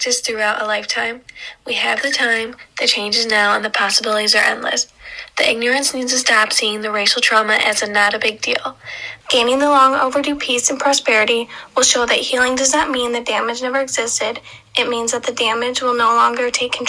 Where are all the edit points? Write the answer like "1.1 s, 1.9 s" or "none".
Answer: 9.2 s